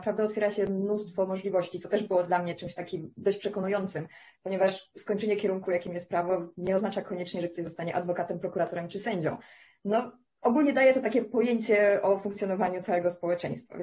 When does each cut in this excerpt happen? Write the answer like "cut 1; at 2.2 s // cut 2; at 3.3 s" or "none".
none